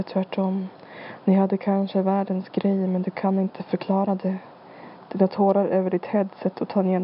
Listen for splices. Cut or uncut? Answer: uncut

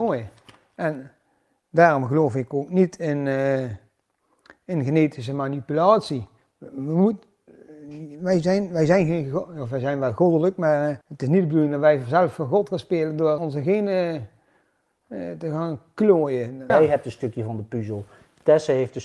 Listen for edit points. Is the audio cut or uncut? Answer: cut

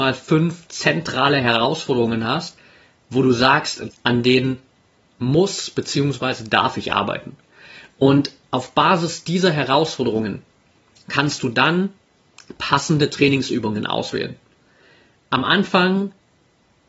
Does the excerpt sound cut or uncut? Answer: cut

